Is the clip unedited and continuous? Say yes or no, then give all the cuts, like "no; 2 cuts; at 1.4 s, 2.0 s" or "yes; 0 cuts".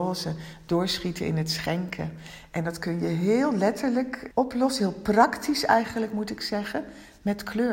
no; 1 cut; at 4.3 s